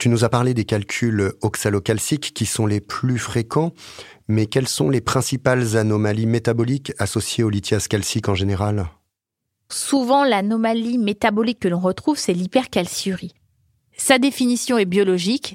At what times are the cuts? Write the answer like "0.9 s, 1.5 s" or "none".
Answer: 9.7 s